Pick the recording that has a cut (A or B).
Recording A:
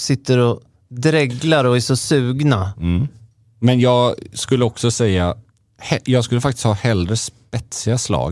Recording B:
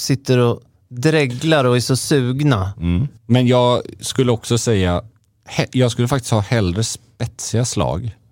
B